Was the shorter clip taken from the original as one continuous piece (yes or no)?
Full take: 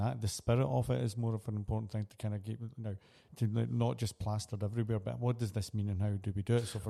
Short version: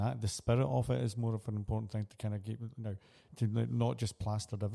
yes